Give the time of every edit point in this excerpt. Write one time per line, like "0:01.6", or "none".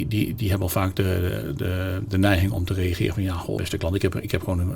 0:03.6